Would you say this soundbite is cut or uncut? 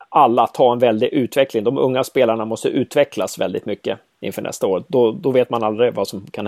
uncut